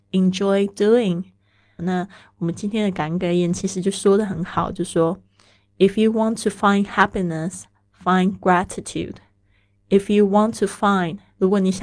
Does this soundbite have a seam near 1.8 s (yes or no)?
yes